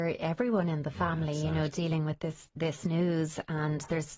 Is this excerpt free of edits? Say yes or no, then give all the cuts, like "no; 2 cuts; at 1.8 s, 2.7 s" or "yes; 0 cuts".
yes; 0 cuts